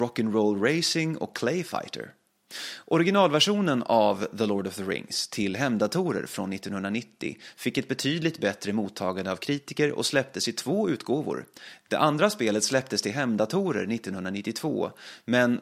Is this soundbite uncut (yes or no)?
no